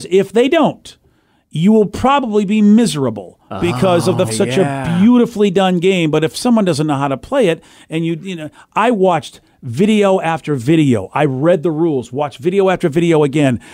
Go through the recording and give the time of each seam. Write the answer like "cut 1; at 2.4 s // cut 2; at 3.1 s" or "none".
cut 1; at 4.3 s